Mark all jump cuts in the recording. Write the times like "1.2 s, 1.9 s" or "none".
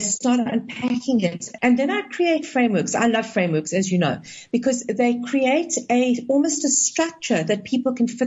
1.6 s